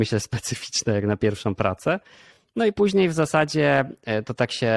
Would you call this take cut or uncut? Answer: uncut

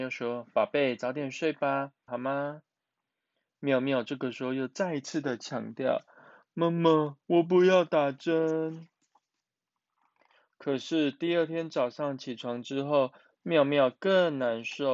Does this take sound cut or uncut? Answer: cut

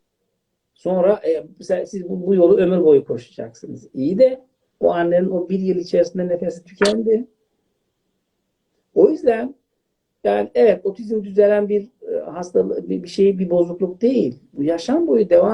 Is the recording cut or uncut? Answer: uncut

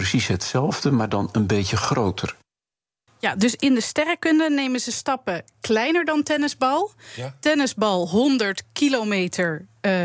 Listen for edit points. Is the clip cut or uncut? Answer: cut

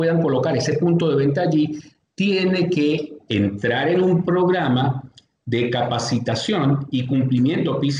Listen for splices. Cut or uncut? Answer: uncut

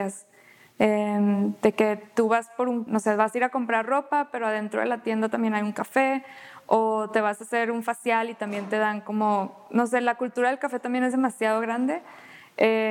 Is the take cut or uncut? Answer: cut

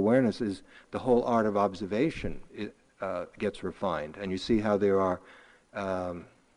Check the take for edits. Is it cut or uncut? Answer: uncut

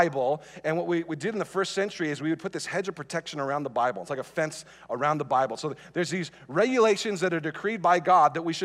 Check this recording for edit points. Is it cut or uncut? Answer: uncut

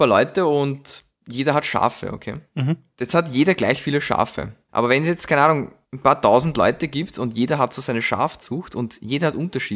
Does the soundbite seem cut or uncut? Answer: cut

